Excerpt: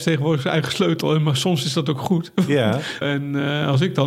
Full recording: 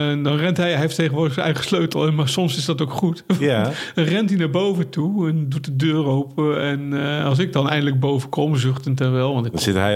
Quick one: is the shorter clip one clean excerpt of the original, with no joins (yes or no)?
no